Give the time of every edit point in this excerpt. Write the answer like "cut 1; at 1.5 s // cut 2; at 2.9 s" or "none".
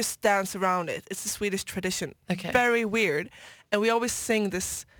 none